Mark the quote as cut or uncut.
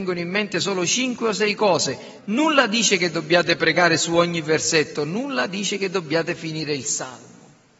cut